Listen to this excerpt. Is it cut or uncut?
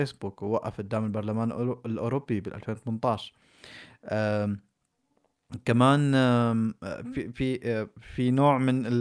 uncut